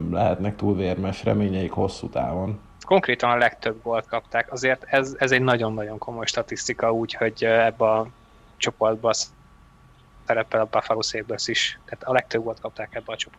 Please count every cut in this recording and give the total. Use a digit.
0